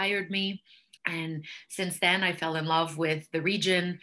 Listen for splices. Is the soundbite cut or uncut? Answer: cut